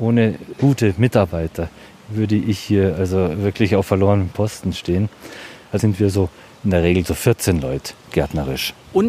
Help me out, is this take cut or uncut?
cut